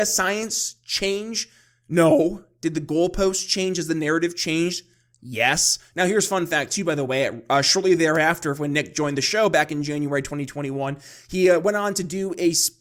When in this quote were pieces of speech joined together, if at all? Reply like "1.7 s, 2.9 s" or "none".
none